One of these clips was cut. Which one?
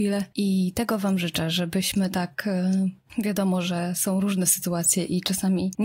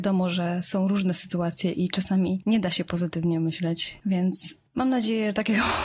second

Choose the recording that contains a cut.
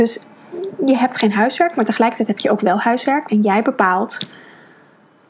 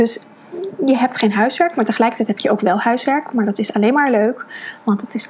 first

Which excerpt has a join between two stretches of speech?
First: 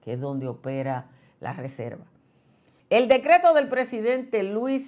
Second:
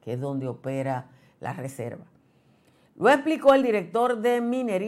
first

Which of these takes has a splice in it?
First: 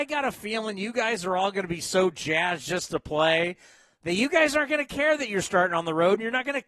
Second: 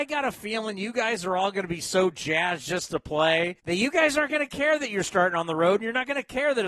second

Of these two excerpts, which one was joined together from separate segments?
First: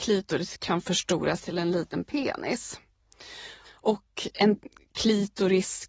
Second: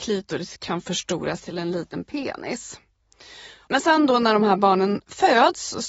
first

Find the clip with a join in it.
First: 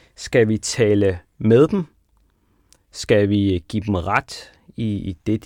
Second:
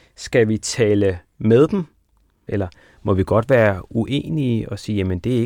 second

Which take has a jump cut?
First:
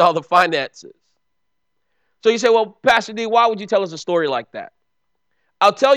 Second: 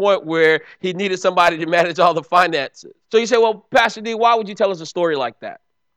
second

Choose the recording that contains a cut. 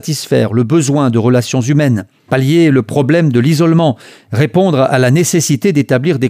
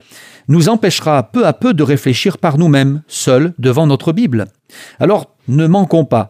second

